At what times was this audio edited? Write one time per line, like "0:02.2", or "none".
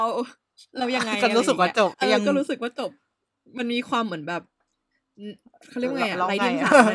0:01.9